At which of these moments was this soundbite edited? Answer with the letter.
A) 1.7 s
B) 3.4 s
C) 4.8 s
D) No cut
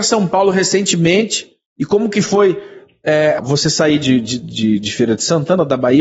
B